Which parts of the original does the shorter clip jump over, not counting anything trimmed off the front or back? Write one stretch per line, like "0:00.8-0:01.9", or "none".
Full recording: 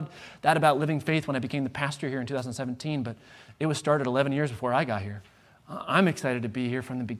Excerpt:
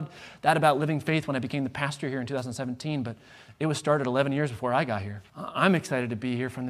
0:05.3-0:05.6